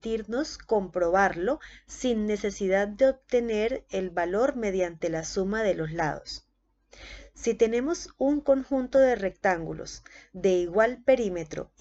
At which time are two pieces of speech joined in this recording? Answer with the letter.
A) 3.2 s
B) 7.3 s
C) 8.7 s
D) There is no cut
D